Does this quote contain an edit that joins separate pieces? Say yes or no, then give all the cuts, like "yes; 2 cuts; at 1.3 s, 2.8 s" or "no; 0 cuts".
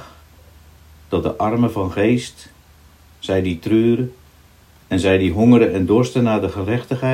yes; 1 cut; at 4.7 s